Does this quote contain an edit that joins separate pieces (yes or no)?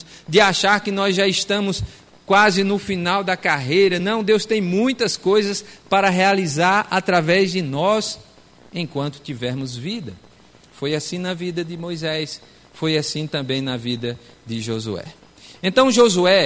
no